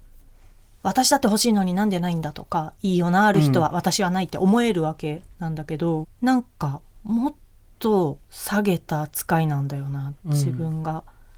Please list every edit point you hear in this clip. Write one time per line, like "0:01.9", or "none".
0:06.0
0:08.2